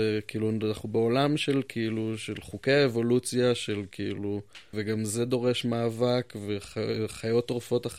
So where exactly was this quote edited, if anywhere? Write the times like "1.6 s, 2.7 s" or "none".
4.7 s